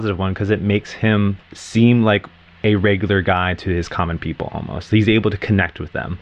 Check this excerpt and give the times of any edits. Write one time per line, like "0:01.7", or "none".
0:01.4